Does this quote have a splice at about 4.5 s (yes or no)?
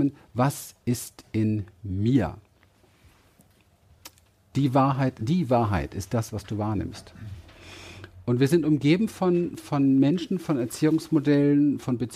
yes